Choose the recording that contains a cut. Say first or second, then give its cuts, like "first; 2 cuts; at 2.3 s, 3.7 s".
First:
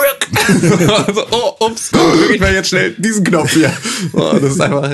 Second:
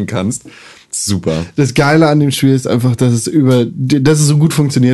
first; 1 cut; at 1.9 s